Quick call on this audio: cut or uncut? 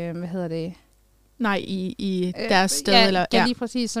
uncut